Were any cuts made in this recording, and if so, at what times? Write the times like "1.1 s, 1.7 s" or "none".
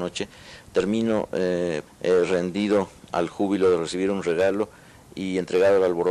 1.9 s